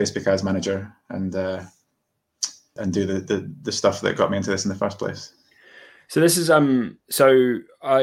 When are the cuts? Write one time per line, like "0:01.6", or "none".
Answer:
0:02.8